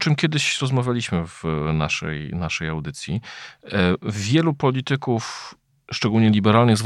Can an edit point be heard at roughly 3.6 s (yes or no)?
no